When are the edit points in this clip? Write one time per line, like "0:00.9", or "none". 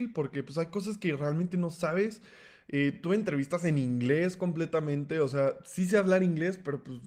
none